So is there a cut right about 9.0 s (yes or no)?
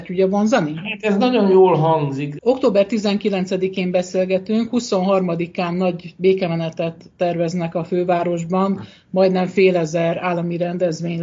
no